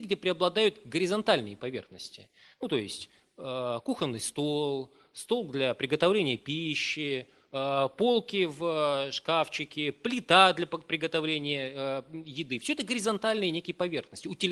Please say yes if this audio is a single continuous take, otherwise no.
yes